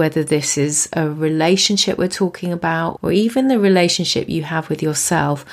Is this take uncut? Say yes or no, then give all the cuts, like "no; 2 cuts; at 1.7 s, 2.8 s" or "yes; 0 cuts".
no; 1 cut; at 3.0 s